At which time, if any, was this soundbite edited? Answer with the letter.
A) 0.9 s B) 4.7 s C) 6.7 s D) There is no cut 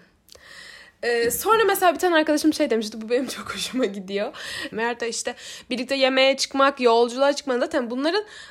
B